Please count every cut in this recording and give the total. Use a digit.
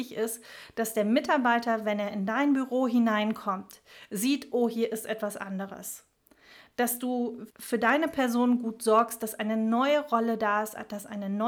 1